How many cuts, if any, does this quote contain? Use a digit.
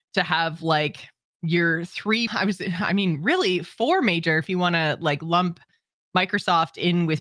1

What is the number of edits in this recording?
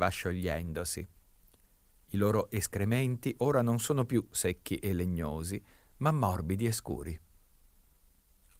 0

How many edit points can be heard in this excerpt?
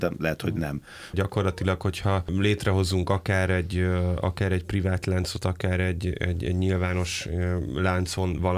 1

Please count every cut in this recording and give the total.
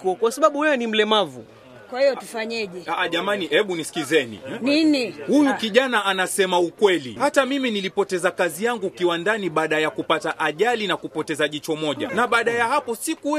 2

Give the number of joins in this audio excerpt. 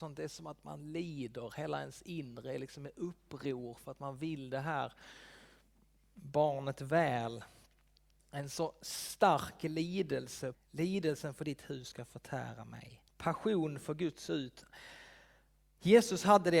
2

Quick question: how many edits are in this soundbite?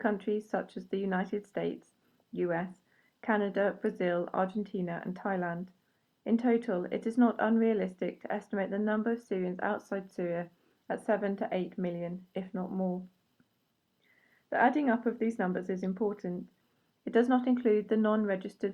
1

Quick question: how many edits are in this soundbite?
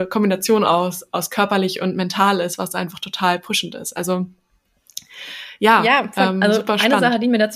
0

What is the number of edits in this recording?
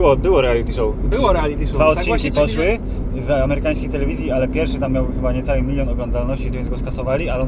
1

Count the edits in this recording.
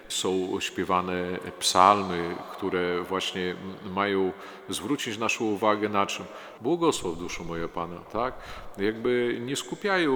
2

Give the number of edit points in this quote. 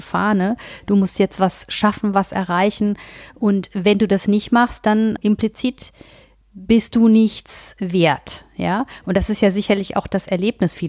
0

